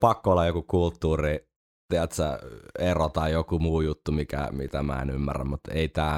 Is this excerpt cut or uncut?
uncut